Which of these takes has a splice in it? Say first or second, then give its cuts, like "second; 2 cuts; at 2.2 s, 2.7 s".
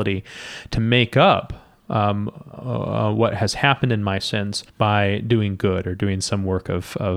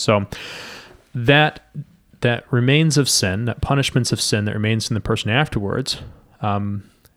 first; 1 cut; at 4.7 s